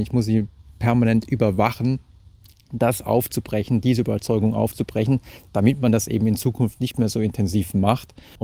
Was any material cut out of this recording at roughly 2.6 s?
no; 0 cuts

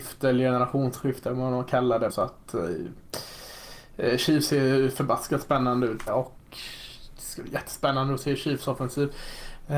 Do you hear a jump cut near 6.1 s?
yes; 2 cuts; at 2.1 s, 6.1 s

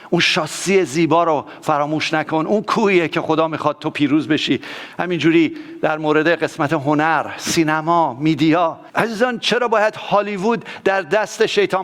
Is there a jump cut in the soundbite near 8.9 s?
yes; 1 cut; at 8.9 s

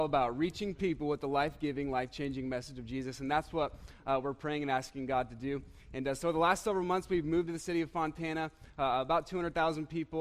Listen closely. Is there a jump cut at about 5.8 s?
no; 0 cuts

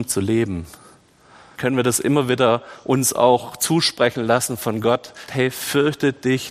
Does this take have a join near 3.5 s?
no; 2 cuts; at 1.6 s, 5.3 s

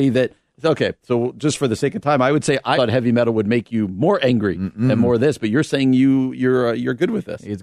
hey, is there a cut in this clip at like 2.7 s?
yes; 1 cut; at 2.7 s

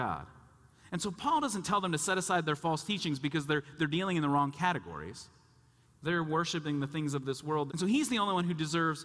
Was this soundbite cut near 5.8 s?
yes; 2 cuts; at 5.8 s, 7.7 s

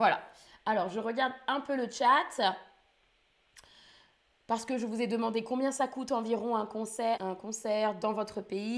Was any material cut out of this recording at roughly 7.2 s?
yes; 1 cut; at 7.2 s

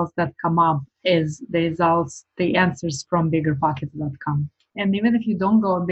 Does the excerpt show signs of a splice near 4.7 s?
yes; 1 cut; at 4.7 s

